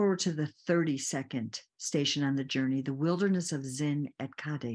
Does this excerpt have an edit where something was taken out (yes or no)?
no